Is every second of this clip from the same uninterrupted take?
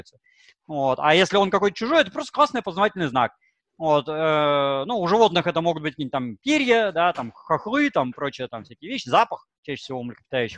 yes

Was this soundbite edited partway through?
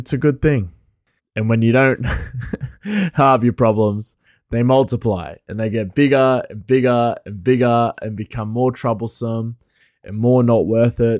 yes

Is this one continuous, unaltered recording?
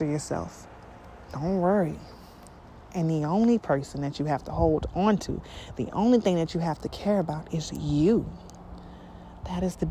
yes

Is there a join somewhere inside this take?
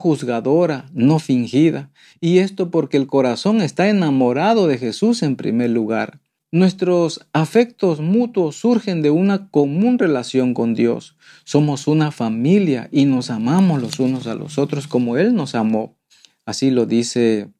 no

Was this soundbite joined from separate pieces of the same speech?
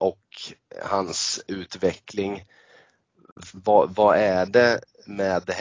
yes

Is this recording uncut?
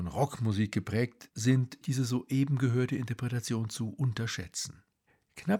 no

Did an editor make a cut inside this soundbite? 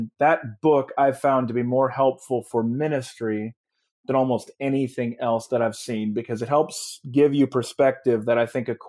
no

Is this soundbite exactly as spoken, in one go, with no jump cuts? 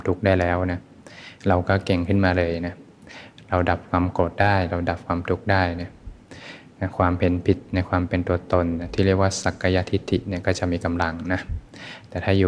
yes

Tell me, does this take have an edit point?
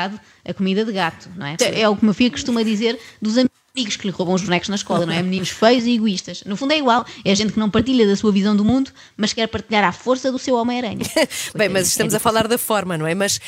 yes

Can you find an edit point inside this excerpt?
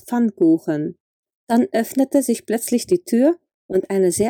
yes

